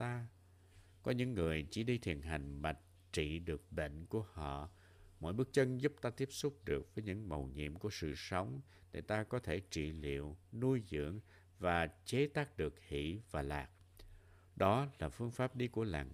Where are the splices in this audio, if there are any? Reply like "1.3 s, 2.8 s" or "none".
none